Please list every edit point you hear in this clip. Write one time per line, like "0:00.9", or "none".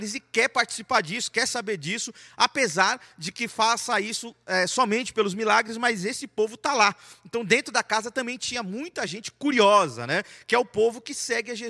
none